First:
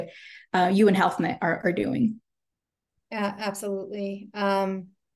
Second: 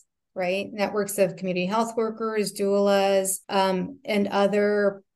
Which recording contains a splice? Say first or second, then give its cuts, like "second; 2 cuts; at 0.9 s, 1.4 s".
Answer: second; 1 cut; at 3.4 s